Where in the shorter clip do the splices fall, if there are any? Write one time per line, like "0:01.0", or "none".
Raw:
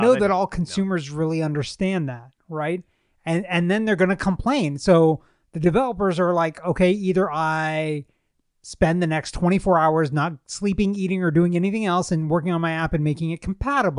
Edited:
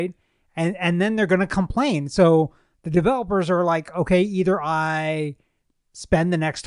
none